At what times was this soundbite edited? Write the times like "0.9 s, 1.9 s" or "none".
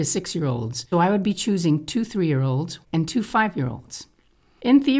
0.9 s, 2.8 s